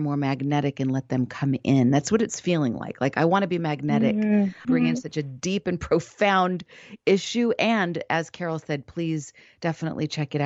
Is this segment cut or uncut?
cut